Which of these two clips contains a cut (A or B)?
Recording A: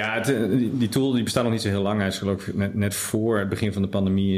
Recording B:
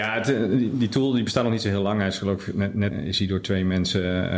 B